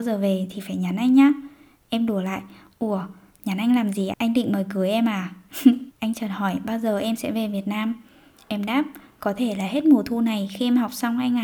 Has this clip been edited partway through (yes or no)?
yes